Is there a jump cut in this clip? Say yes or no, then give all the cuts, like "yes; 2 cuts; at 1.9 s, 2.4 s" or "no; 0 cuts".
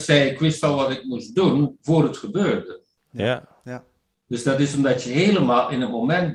no; 0 cuts